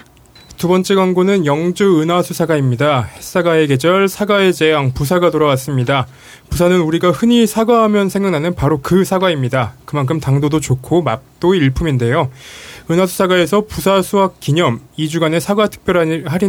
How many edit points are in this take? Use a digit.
0